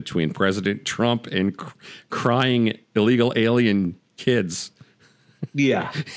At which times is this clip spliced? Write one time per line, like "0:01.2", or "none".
none